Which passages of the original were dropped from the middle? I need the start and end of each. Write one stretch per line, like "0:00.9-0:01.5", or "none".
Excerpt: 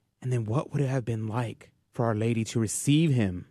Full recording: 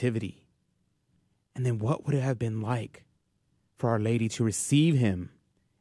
0:03.1-0:03.6